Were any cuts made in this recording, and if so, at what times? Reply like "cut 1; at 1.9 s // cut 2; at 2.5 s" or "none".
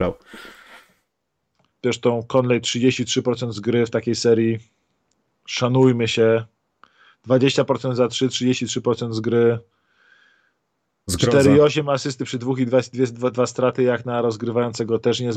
cut 1; at 1.7 s